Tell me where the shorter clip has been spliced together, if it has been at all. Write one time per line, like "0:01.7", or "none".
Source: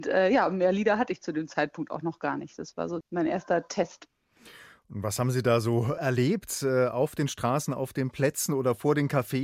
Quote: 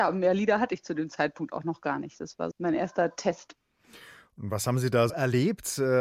0:02.5
0:05.1